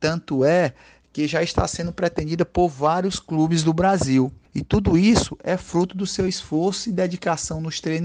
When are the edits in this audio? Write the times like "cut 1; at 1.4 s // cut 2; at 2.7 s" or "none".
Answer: none